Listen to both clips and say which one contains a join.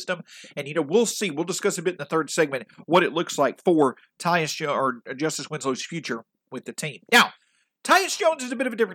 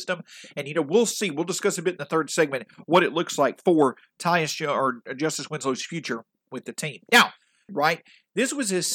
second; 1 cut; at 7.7 s

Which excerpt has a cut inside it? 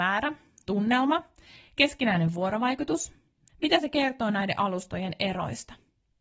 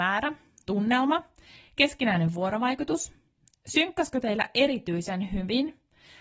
first; 1 cut; at 3.5 s

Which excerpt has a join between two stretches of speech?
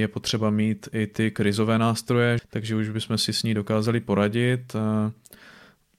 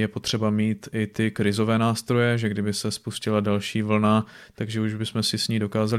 first; 1 cut; at 2.4 s

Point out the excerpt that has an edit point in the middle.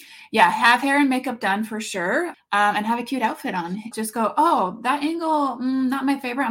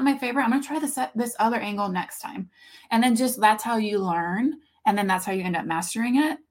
first; 2 cuts; at 2.3 s, 3.9 s

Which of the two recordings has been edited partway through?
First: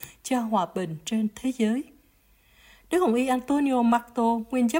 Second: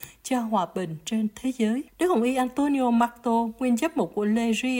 second; 1 cut; at 1.9 s

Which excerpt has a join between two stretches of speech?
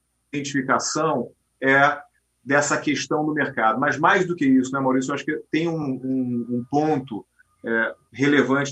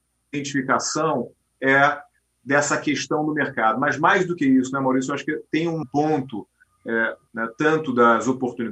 second; 2 cuts; at 5.8 s, 7.3 s

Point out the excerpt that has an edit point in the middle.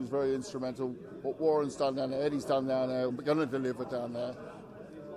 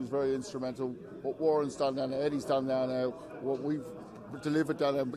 first; 1 cut; at 3.1 s

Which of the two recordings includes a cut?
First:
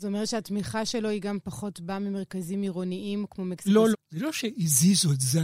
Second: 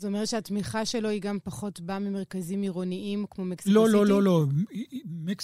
first; 1 cut; at 3.9 s

